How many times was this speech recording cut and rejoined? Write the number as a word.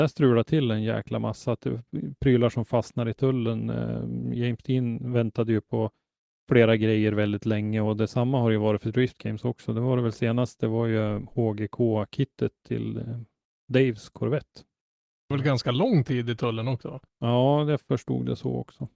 two